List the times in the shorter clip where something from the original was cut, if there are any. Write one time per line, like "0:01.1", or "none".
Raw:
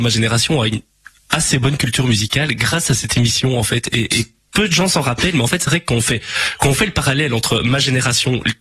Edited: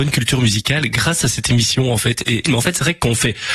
0:02.5